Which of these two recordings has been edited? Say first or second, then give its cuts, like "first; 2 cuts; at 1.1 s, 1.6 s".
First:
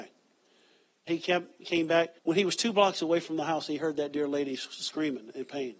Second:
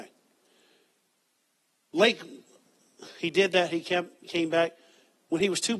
first; 2 cuts; at 1.1 s, 2.2 s